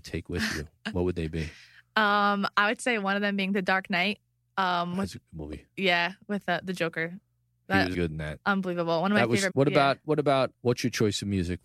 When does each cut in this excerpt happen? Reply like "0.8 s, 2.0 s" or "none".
7.9 s, 9.5 s, 10.5 s